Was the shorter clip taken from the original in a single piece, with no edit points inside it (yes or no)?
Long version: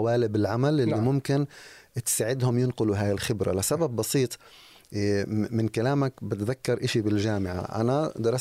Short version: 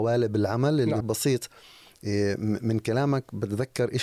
no